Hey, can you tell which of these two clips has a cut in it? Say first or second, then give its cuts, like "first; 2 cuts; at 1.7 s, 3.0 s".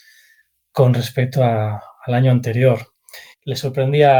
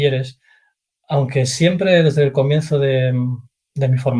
first; 1 cut; at 3.3 s